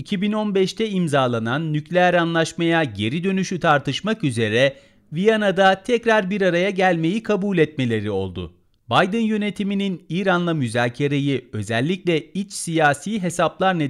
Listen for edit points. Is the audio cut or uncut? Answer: cut